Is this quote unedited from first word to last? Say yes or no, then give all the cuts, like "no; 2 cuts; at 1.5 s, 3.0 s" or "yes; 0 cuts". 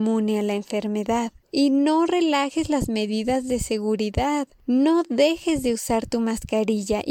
no; 1 cut; at 1.4 s